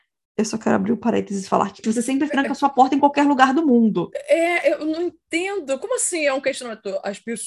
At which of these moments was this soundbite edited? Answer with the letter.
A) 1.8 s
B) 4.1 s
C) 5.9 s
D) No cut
A